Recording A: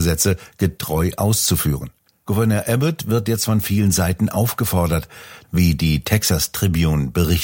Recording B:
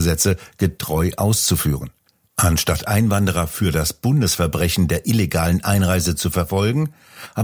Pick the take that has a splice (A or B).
A